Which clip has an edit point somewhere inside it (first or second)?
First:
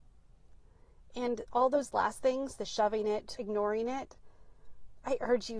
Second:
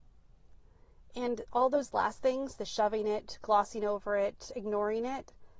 first